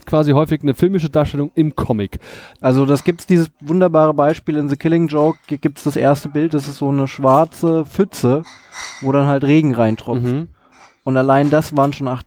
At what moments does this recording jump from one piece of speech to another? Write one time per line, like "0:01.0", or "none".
0:02.6